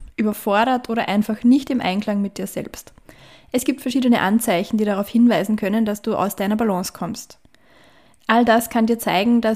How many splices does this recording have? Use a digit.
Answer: 1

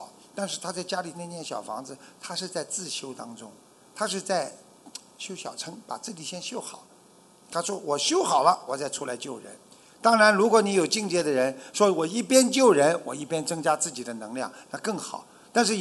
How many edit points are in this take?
2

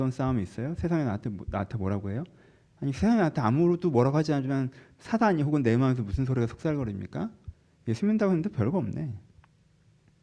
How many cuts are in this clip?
0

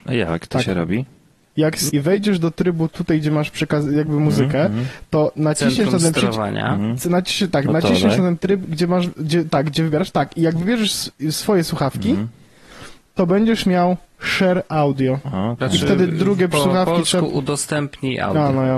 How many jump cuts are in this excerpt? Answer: 1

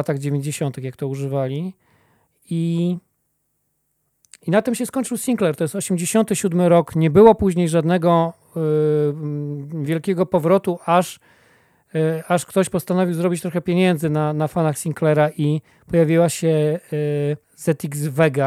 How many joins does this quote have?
1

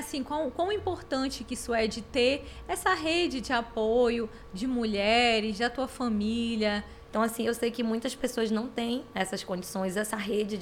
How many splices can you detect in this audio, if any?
1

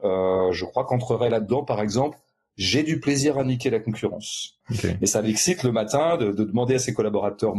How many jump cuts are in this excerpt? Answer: 1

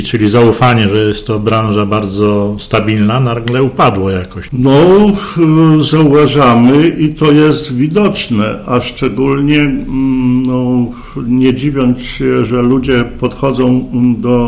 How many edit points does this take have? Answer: 1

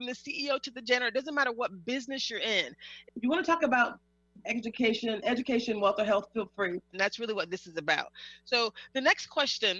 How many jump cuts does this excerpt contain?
2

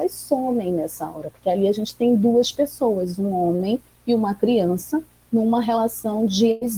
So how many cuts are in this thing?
0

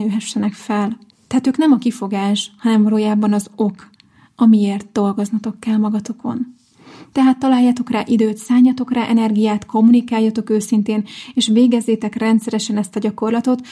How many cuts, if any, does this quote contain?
0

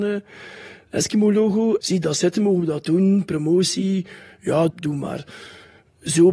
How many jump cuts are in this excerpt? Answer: 2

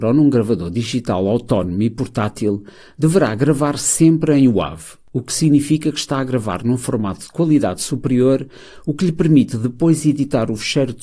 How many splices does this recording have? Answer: 0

